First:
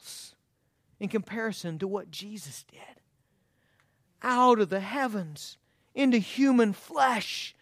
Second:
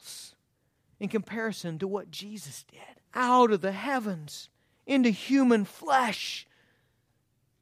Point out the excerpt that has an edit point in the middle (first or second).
second